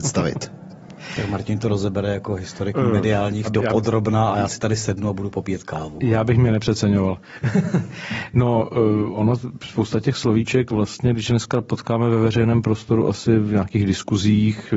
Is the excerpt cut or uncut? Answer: cut